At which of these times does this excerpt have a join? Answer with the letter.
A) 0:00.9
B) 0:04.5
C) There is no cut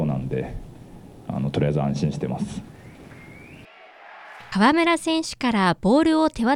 B